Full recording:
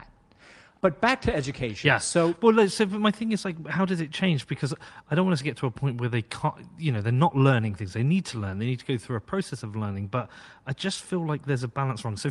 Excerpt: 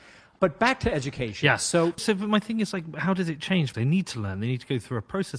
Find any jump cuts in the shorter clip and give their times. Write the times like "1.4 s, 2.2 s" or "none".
2.0 s, 3.7 s